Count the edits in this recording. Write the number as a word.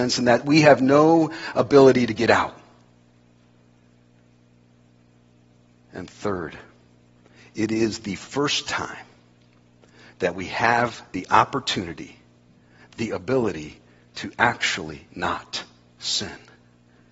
zero